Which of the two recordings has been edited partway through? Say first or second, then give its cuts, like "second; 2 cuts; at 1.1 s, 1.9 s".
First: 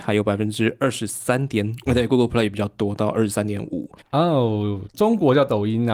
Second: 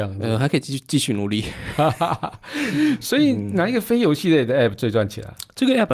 first; 2 cuts; at 1.9 s, 4.0 s